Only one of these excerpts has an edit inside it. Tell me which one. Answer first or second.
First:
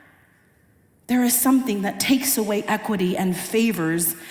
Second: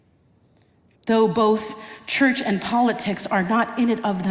second